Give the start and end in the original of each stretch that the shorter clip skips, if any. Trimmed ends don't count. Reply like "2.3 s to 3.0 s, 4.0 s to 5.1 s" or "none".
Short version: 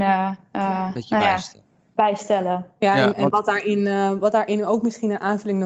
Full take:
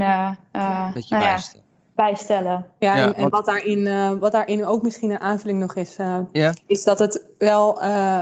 none